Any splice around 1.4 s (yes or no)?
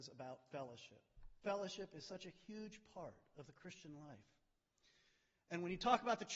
no